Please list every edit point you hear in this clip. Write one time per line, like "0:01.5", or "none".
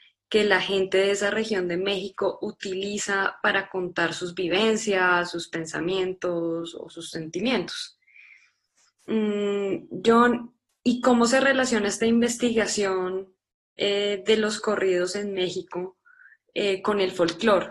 none